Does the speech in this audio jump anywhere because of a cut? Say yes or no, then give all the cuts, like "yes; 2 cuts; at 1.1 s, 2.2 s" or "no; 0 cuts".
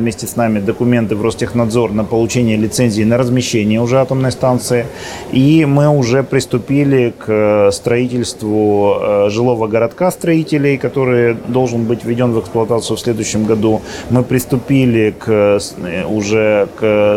no; 0 cuts